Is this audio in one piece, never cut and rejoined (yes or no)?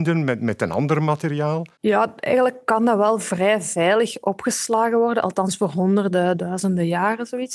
yes